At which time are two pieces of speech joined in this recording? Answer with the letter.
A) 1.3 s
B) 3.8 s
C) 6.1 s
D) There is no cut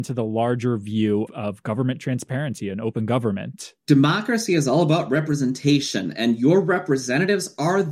A